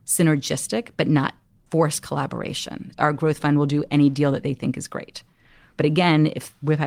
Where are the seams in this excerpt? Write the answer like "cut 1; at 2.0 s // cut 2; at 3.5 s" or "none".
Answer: cut 1; at 2.9 s